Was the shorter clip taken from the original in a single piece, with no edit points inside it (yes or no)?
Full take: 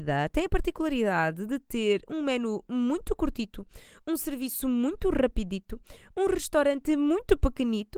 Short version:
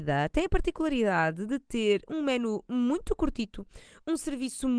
yes